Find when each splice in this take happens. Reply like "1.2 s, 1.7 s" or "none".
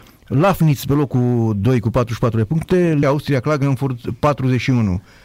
3.0 s